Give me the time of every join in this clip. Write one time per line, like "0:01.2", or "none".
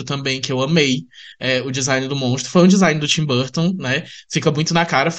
none